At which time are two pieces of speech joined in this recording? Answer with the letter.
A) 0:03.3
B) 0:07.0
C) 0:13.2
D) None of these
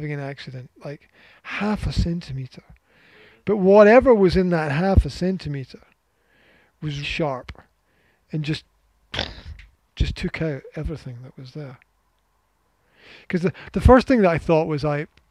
B